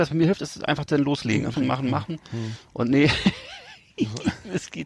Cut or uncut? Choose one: cut